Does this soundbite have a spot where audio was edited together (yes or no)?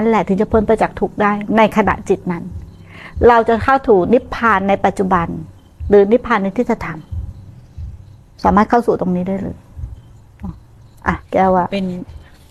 yes